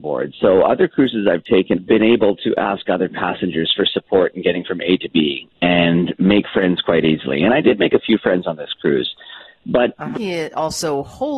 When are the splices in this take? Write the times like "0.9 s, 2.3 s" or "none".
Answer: 1.7 s, 10.1 s